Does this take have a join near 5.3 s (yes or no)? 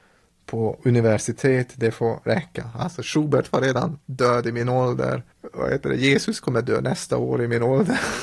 yes